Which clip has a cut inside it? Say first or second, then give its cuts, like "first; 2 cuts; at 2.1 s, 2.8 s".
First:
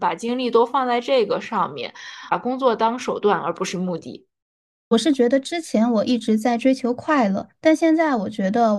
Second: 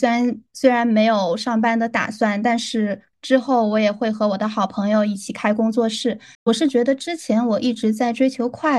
second; 2 cuts; at 3.1 s, 6.3 s